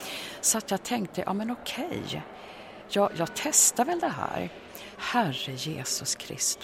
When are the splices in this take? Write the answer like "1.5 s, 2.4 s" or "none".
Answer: 5.0 s

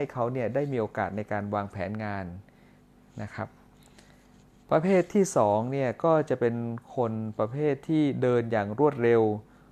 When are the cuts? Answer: none

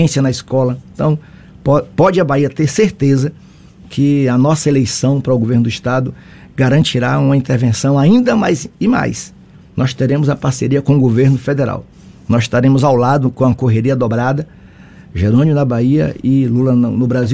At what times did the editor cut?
none

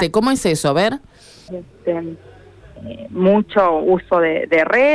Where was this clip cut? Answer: 1.5 s

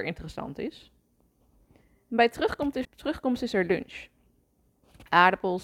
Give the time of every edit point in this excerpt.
2.8 s

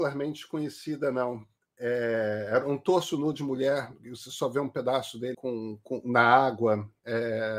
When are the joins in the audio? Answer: 5.3 s

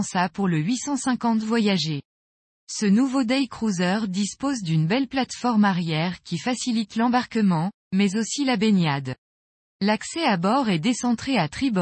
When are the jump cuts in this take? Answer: none

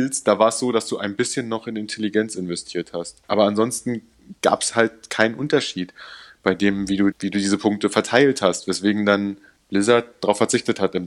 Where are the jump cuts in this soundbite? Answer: 7.1 s

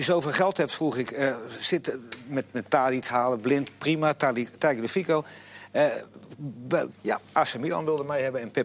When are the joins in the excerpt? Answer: 6.9 s

